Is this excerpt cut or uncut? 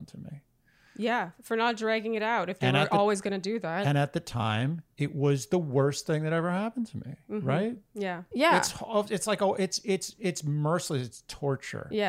cut